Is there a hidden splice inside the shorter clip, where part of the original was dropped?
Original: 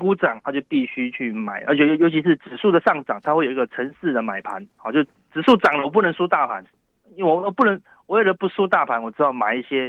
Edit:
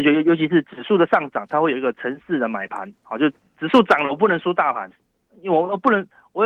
no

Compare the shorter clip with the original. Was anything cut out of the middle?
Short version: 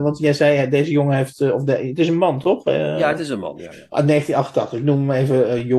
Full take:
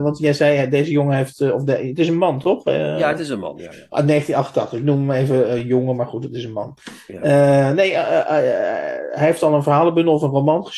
no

